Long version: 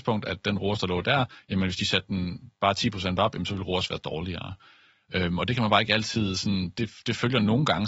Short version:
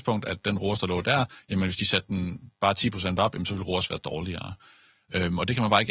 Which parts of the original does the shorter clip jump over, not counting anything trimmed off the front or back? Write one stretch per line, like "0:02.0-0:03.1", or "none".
none